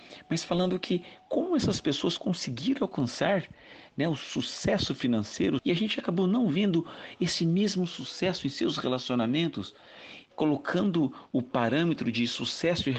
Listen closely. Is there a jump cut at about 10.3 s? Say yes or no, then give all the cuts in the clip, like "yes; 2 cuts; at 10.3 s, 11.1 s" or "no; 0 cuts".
yes; 2 cuts; at 5.6 s, 10.3 s